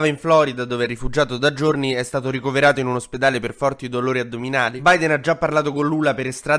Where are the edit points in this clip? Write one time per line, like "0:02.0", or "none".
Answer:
none